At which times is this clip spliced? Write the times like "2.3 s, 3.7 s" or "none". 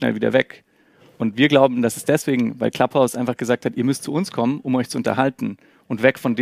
none